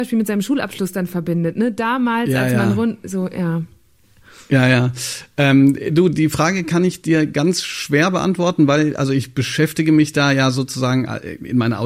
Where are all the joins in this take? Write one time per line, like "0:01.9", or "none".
none